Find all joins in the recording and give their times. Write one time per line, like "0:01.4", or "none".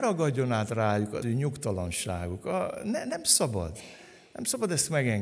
0:01.2